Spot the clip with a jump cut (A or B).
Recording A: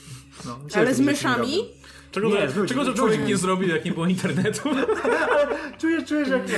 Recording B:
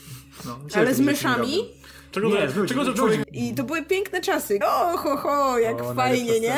B